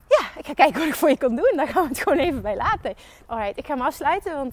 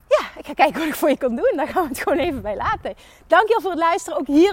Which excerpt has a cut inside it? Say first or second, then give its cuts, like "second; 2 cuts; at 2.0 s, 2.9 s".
first; 1 cut; at 3.2 s